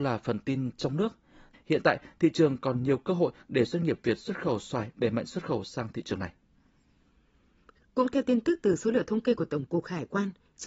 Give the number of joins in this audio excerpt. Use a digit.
1